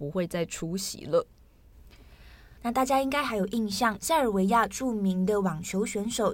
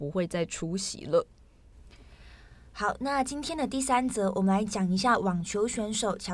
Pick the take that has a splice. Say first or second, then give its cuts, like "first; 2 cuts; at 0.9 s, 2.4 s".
first; 2 cuts; at 2.6 s, 4.0 s